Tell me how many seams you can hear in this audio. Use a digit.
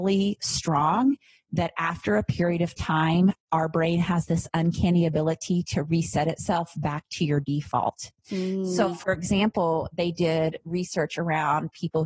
0